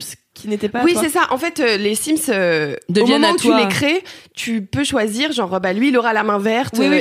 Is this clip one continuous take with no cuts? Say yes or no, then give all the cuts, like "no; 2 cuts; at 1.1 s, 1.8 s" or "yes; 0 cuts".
yes; 0 cuts